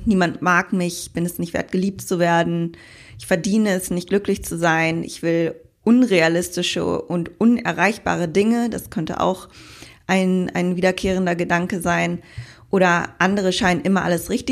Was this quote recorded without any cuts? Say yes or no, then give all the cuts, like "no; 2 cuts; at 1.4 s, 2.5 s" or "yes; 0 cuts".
yes; 0 cuts